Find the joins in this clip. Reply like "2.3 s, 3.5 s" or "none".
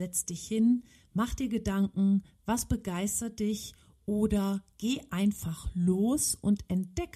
none